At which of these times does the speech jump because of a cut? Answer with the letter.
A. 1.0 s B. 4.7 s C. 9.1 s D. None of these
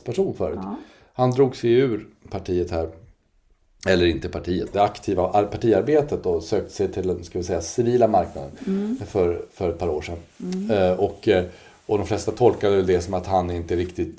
B